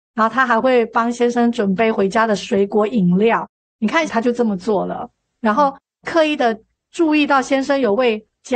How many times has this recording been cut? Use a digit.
1